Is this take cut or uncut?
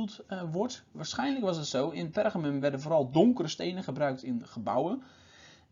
uncut